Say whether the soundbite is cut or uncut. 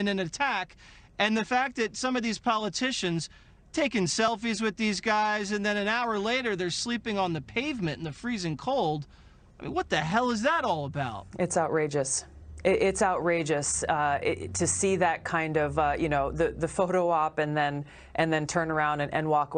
uncut